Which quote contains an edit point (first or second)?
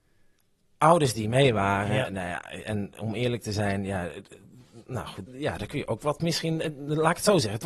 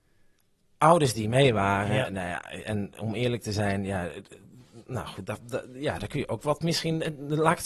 first